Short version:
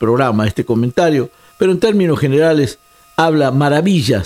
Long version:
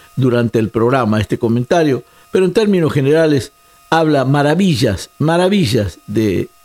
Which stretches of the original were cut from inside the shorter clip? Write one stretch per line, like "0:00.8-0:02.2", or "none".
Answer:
none